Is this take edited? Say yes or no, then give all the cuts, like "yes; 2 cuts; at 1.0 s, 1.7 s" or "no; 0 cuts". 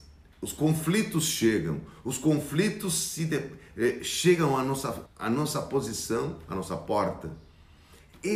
yes; 1 cut; at 5.1 s